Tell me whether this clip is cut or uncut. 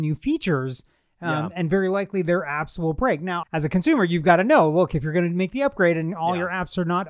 cut